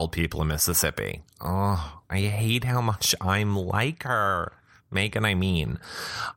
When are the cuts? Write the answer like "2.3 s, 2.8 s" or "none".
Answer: none